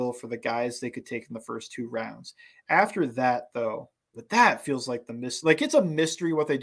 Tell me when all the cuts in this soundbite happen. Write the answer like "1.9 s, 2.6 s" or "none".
4.1 s, 5.4 s